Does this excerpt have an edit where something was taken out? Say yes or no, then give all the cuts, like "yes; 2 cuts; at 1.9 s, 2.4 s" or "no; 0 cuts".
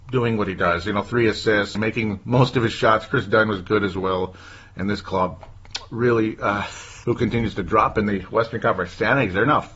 yes; 2 cuts; at 1.8 s, 7.0 s